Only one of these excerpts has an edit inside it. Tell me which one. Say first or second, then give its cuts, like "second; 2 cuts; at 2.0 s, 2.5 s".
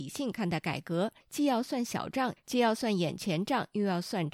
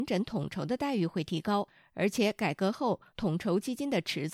first; 1 cut; at 2.4 s